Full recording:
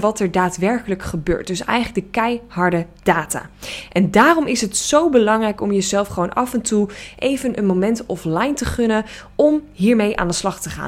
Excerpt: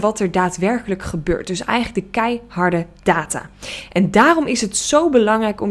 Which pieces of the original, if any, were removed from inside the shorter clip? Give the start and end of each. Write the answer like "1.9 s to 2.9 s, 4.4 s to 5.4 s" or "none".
none